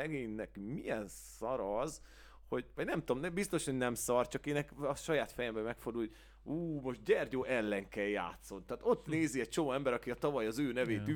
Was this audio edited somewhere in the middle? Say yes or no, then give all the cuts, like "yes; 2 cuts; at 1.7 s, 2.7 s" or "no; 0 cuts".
no; 0 cuts